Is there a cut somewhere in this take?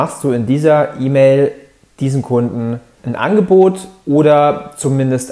yes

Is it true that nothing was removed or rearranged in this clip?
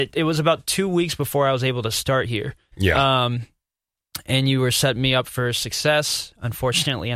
yes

